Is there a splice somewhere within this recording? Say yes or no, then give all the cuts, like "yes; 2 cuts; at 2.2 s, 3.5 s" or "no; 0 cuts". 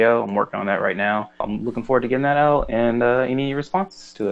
yes; 1 cut; at 1.4 s